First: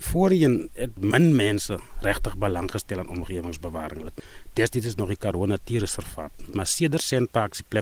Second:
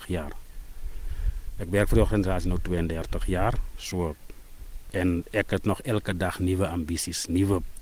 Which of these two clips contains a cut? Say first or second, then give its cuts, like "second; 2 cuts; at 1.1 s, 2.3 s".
first; 1 cut; at 6.5 s